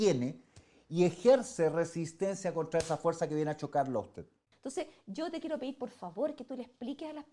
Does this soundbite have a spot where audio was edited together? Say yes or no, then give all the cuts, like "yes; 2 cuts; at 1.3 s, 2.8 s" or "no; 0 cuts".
yes; 1 cut; at 4.5 s